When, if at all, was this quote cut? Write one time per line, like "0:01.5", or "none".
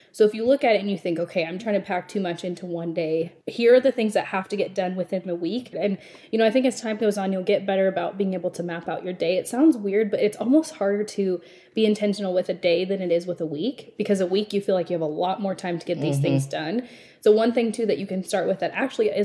0:01.6
0:03.4
0:05.7